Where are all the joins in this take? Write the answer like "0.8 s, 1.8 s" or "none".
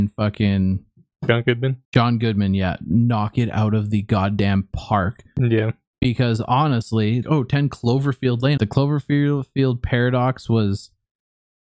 1.8 s, 7.2 s, 8.6 s